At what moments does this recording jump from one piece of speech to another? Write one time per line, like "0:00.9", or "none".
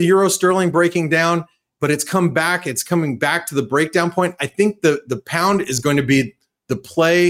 none